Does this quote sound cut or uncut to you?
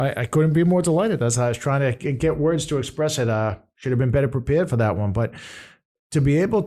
uncut